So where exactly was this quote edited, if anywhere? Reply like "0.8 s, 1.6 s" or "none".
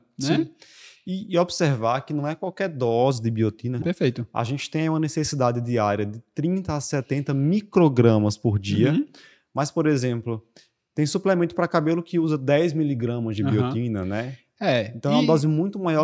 3.8 s

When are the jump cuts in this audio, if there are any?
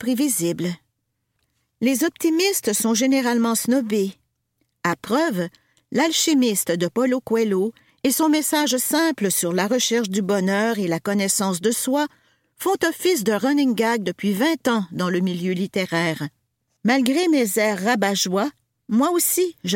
16.8 s

